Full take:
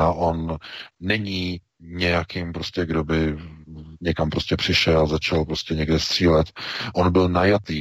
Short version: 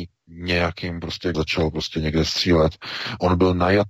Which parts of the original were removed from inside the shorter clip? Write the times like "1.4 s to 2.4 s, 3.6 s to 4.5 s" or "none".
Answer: 2.9 s to 5.1 s